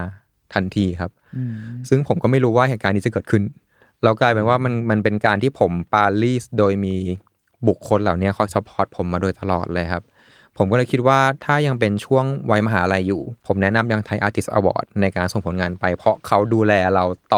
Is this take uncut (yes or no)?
no